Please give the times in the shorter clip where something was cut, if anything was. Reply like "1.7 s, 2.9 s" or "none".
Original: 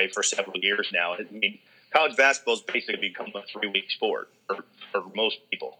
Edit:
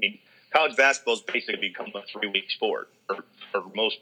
none